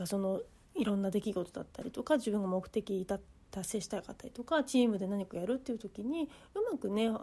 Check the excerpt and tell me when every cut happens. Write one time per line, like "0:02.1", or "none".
none